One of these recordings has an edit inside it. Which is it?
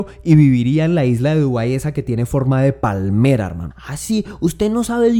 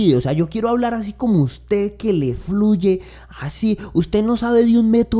first; 1 cut; at 3.7 s

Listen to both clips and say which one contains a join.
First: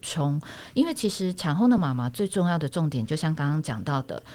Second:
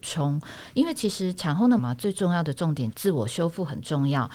second; 2 cuts; at 1.8 s, 2.9 s

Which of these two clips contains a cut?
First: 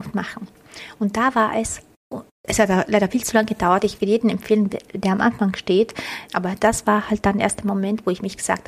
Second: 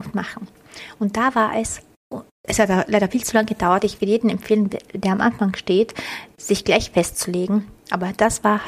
first; 1 cut; at 6.3 s

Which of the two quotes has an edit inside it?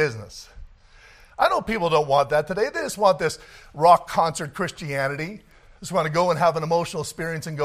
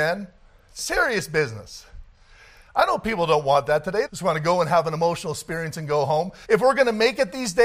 second; 2 cuts; at 4.0 s, 6.4 s

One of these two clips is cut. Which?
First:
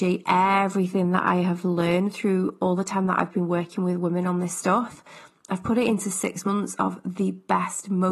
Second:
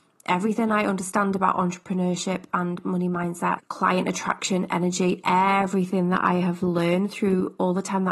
second; 1 cut; at 3.6 s

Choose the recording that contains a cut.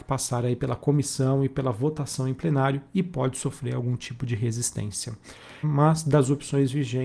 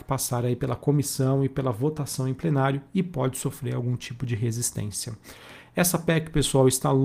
first; 1 cut; at 5.6 s

